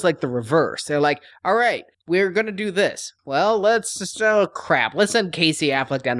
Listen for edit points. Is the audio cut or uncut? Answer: cut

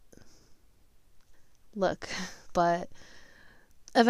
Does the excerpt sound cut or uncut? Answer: cut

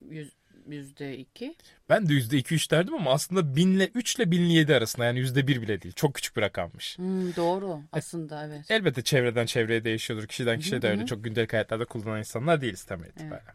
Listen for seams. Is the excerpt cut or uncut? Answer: cut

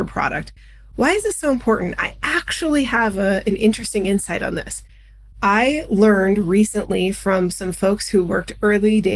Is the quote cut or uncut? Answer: uncut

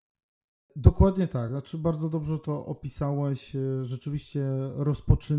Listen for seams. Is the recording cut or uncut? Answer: uncut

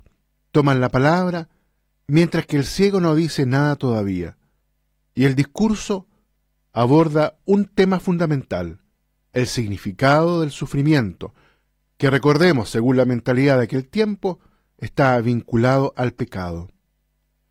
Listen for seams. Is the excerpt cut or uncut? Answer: uncut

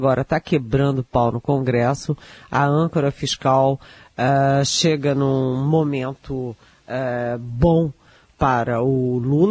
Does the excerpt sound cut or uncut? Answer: uncut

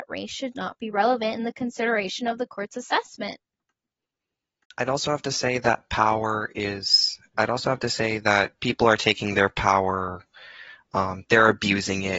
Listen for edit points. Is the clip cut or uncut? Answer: uncut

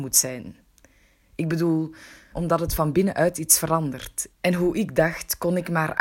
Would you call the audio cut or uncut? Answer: cut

